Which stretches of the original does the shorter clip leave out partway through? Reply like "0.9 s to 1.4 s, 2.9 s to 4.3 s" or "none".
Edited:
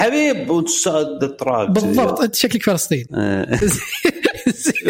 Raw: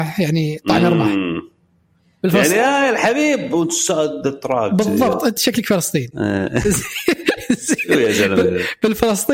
none